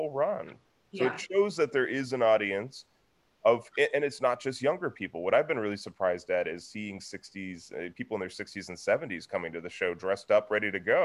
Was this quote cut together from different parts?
no; 0 cuts

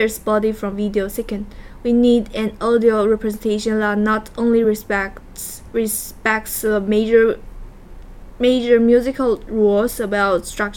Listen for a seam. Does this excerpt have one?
no; 0 cuts

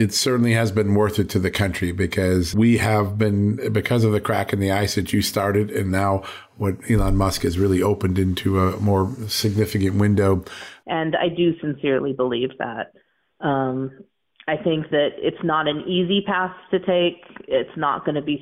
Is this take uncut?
no; 1 cut; at 10.8 s

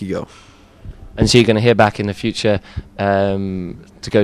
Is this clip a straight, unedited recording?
yes; 0 cuts

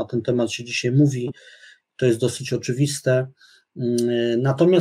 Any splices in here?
no; 0 cuts

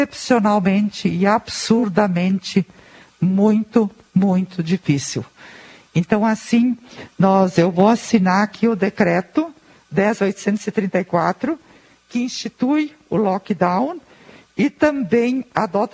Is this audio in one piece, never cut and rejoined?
yes; 0 cuts

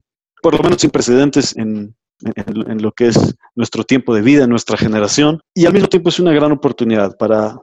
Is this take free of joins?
no; 2 cuts; at 1.5 s, 5.5 s

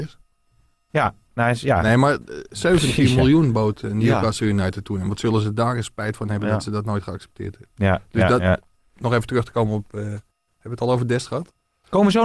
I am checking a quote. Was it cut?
no; 0 cuts

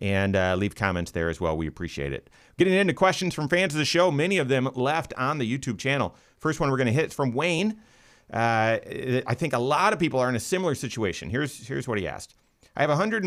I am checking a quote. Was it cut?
no; 0 cuts

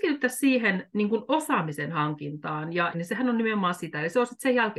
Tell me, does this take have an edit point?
yes; 1 cut; at 2.9 s

